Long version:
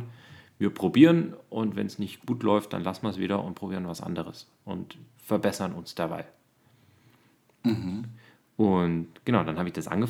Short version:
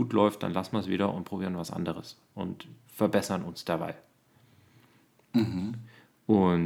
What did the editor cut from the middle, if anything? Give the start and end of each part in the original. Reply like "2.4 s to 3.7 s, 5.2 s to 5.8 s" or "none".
none